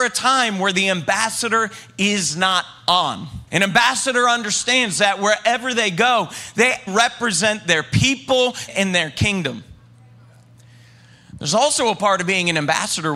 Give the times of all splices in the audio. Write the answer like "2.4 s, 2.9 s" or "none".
3.5 s, 6.9 s, 8.7 s